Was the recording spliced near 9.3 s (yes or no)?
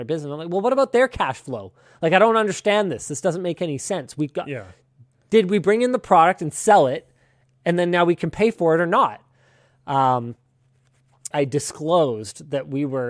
no